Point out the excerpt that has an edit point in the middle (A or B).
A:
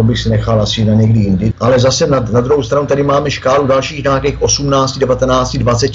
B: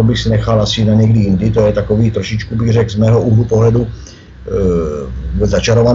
A